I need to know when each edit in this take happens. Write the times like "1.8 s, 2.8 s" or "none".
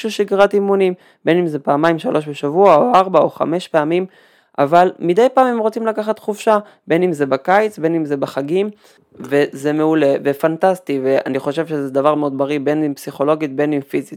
12.1 s